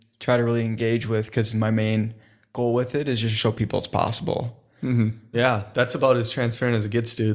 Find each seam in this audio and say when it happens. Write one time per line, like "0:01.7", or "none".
0:05.3